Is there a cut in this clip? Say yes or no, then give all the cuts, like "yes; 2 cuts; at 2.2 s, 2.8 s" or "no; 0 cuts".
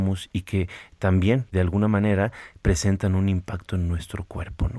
yes; 1 cut; at 1.5 s